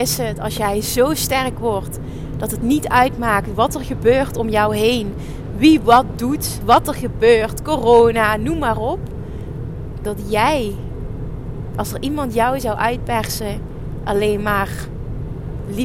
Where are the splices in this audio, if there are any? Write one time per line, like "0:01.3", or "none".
0:06.6